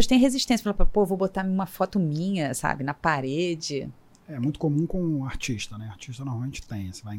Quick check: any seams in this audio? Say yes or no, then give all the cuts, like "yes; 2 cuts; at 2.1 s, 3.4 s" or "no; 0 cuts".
no; 0 cuts